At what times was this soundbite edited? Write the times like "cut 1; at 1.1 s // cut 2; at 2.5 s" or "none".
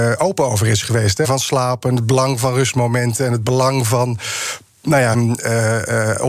cut 1; at 1.2 s // cut 2; at 5.1 s